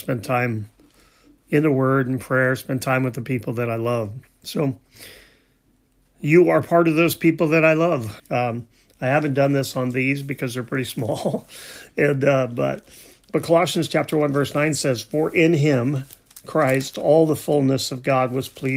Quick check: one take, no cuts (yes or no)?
no